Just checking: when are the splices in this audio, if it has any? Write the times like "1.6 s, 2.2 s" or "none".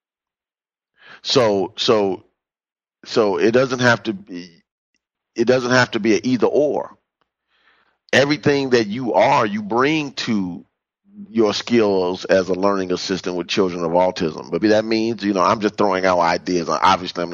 14.6 s